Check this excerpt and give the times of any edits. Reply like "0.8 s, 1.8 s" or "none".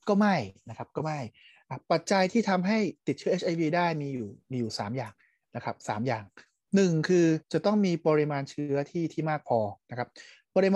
7.4 s